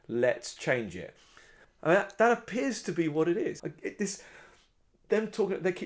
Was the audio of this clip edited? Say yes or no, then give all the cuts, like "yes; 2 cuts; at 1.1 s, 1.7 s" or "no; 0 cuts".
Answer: yes; 2 cuts; at 1.6 s, 3.6 s